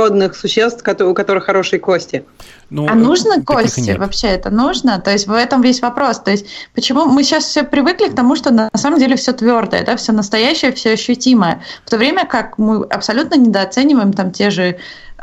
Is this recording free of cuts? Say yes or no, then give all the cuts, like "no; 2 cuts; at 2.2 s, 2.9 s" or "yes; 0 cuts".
yes; 0 cuts